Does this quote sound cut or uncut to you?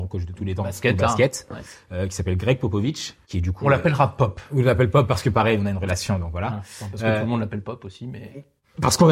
uncut